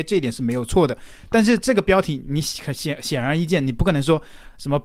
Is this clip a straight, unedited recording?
yes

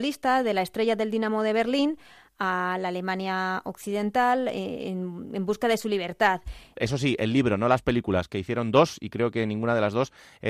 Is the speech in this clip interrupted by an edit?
yes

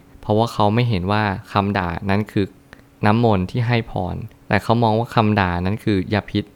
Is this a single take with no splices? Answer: yes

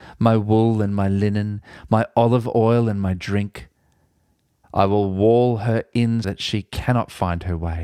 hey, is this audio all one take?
no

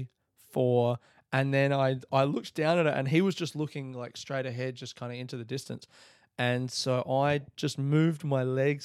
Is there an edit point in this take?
no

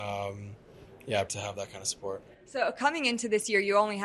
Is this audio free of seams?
no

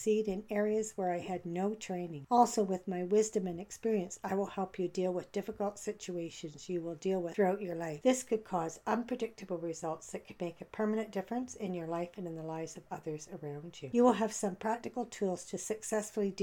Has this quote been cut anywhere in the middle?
yes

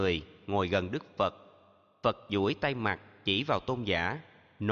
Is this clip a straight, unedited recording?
yes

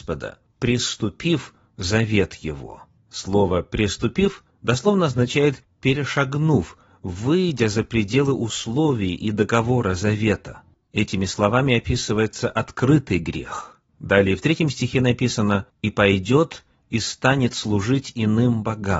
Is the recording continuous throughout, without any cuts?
yes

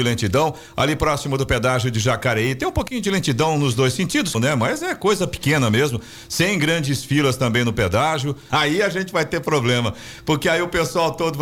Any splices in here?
yes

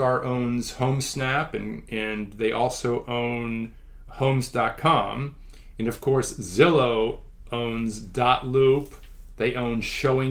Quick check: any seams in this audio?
no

